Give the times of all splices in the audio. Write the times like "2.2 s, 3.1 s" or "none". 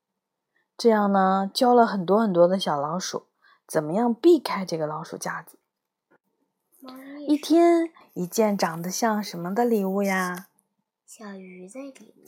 8.0 s